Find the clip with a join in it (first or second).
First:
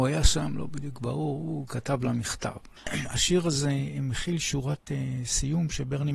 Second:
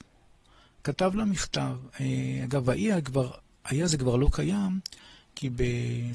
first